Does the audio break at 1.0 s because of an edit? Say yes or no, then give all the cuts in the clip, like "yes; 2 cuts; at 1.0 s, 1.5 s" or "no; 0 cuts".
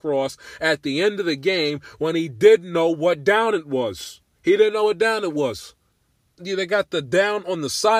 no; 2 cuts; at 4.3 s, 6.3 s